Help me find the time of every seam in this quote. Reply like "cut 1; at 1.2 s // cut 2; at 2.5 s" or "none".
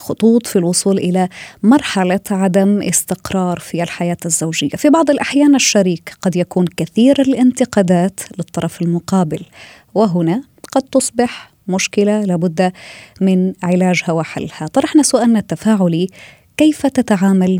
none